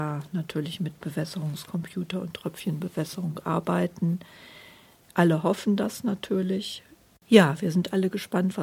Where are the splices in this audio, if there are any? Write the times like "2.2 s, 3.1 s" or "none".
5.1 s, 7.2 s